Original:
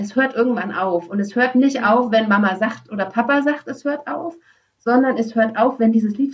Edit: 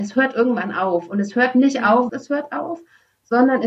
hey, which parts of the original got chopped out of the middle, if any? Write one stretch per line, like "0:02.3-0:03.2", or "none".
0:02.1-0:03.6